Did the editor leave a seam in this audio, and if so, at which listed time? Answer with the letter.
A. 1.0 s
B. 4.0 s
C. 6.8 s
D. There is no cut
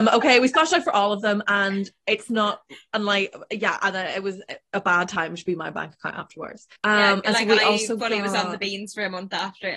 C